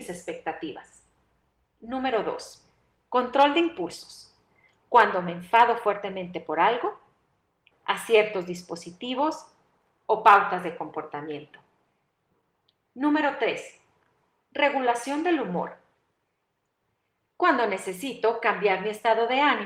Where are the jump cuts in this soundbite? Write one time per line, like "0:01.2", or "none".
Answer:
0:07.7